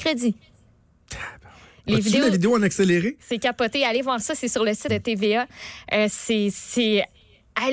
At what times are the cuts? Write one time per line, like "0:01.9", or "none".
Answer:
0:04.9